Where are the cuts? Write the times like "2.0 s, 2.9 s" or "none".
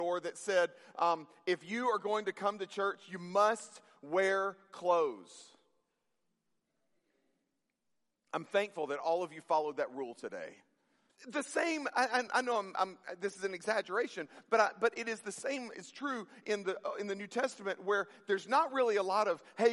11.1 s, 12.3 s